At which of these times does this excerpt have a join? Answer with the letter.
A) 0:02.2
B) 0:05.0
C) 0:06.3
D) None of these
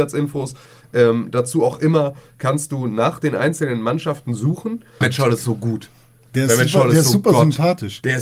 B